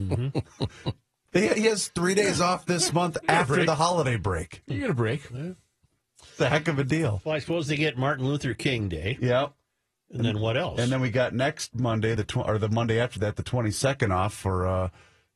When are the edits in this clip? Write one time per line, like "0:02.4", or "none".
none

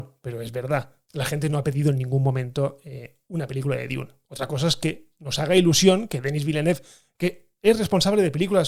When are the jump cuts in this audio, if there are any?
none

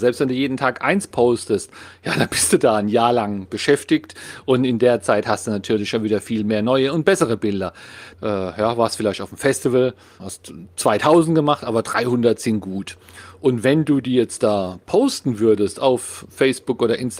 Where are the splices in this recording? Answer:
0:08.1
0:10.2

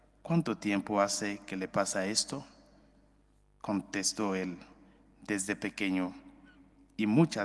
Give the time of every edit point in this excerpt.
none

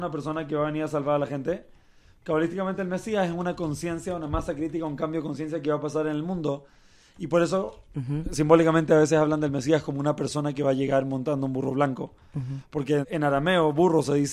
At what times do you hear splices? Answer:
0:07.9
0:13.0

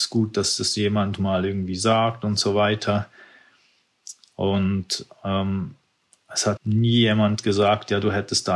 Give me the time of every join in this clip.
0:06.6

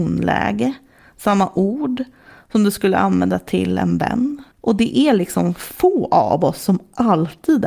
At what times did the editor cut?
0:04.5

